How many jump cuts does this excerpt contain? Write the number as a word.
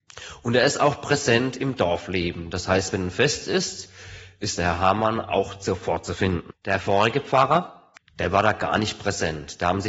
two